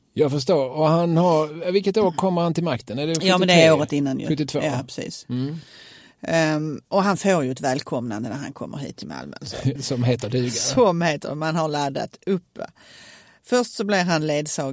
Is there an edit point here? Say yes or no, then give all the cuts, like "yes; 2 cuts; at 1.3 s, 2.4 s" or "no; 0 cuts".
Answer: yes; 1 cut; at 9.8 s